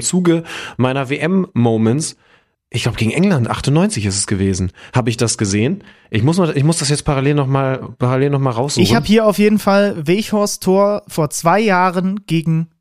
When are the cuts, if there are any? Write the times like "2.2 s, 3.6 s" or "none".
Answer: none